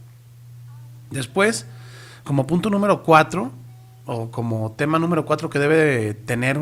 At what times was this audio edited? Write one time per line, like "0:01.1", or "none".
0:02.2